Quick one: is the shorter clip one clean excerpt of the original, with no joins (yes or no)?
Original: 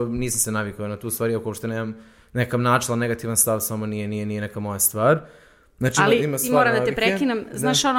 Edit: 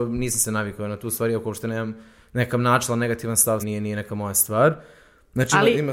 no